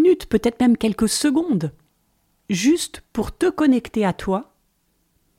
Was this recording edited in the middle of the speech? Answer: no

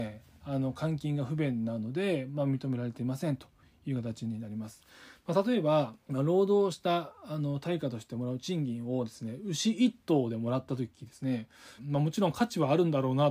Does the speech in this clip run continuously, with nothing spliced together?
no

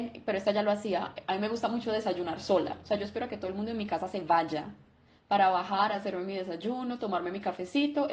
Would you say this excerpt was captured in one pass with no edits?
yes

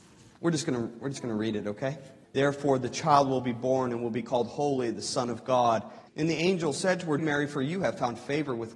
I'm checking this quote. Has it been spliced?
yes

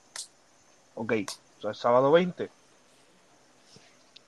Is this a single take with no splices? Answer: no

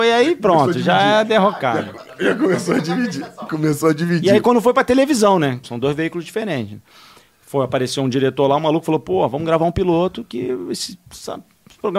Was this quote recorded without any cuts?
no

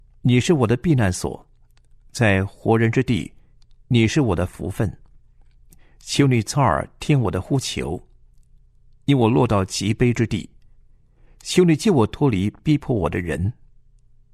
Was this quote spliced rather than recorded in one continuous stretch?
no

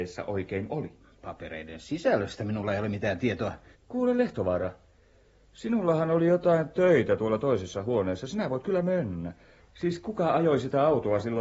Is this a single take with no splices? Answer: no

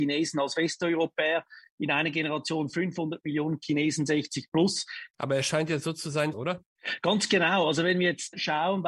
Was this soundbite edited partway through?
yes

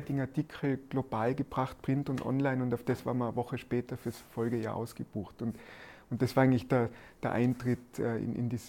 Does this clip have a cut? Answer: no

